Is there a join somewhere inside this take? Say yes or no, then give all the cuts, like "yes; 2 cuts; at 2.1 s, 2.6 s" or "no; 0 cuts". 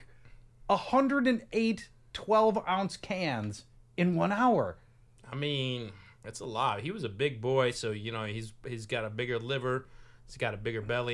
no; 0 cuts